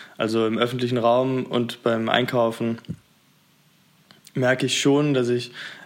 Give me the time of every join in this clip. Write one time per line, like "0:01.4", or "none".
none